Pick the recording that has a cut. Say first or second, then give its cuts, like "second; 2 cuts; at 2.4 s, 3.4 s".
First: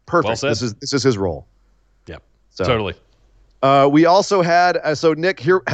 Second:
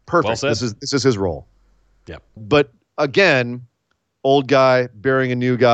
second; 1 cut; at 2.4 s